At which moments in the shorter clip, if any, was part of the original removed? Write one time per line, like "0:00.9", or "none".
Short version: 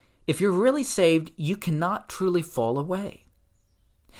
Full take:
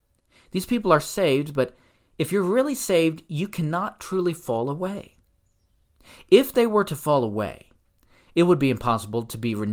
none